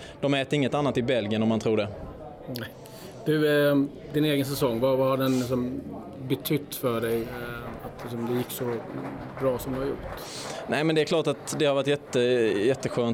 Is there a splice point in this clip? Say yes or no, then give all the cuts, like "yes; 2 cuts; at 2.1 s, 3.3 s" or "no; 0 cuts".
no; 0 cuts